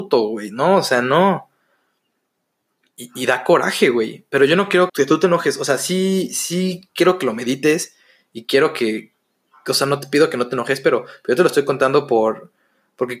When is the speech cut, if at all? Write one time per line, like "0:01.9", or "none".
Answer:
0:04.9